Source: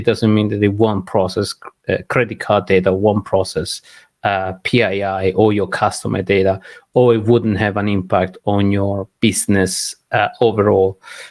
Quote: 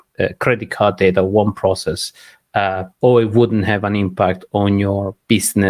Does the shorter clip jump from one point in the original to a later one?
yes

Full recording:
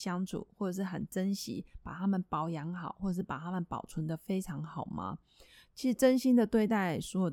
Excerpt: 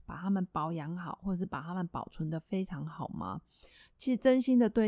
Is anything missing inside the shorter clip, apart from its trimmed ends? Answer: no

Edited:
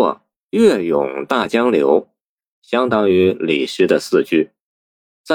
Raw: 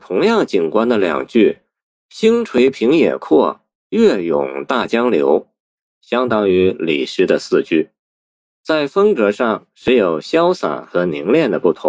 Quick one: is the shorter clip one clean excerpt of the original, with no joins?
yes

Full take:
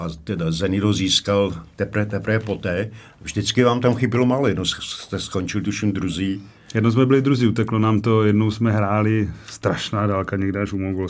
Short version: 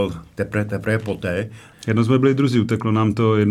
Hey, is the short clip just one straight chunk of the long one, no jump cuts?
no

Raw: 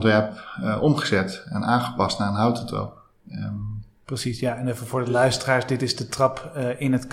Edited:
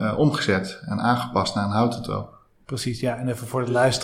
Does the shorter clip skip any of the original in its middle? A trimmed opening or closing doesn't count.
yes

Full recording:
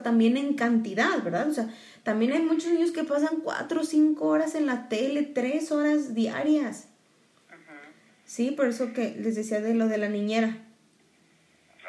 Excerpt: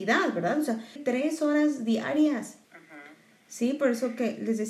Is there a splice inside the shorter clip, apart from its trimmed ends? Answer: yes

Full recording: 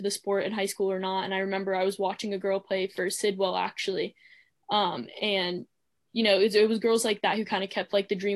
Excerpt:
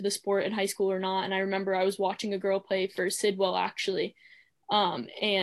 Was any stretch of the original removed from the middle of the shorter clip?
no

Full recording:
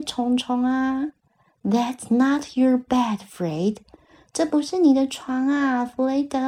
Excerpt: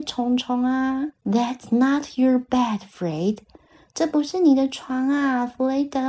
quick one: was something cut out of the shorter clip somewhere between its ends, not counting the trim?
yes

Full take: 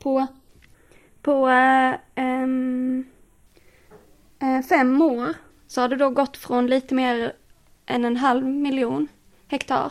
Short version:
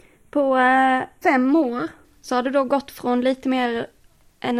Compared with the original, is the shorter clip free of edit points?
no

